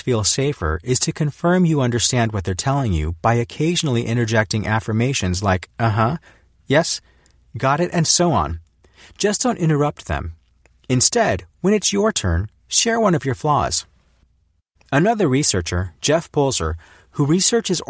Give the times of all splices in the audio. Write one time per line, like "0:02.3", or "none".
0:14.8